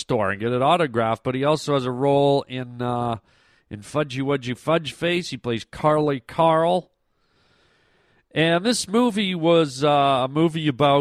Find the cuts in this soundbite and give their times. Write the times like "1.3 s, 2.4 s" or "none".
none